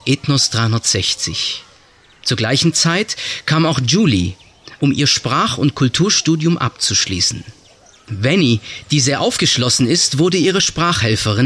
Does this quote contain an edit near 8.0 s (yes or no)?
no